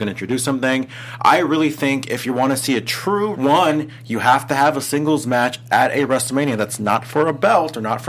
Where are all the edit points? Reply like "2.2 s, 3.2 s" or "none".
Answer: 3.3 s